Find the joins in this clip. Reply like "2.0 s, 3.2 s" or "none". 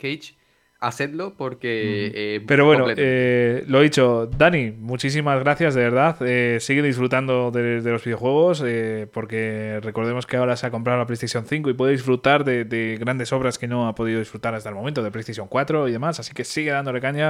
2.4 s